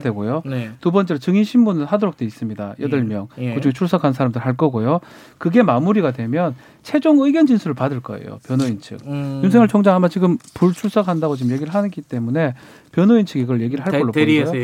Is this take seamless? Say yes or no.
yes